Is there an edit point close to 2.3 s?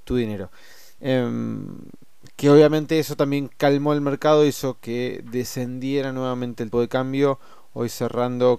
no; 2 cuts; at 1.0 s, 6.7 s

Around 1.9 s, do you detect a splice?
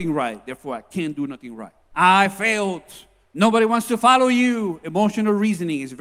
yes; 1 cut; at 1.9 s

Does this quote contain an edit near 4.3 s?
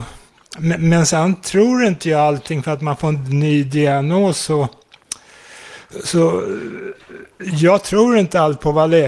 no; 0 cuts

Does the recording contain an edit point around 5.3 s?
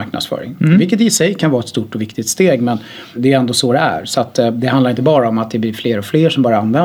no; 1 cut; at 3.2 s

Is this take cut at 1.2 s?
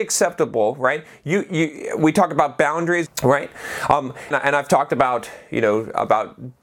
no; 2 cuts; at 3.1 s, 4.3 s

